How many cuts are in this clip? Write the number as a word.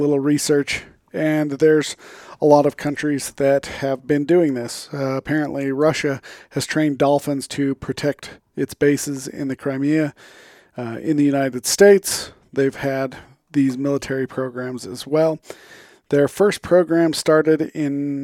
zero